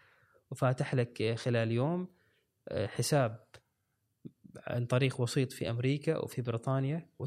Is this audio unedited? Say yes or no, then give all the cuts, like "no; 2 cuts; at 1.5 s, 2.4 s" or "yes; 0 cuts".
yes; 0 cuts